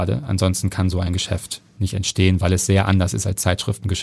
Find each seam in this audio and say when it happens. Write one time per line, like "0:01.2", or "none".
none